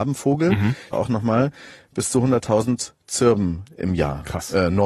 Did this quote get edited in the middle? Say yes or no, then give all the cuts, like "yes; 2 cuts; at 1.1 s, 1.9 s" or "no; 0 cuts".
yes; 1 cut; at 0.9 s